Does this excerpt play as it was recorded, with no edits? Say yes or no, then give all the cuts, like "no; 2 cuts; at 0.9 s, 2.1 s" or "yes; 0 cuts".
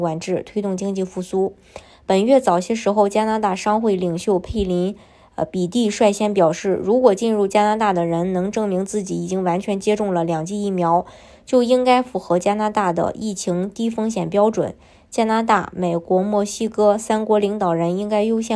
yes; 0 cuts